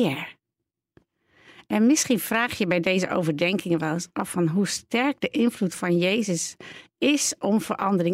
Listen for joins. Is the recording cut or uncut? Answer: uncut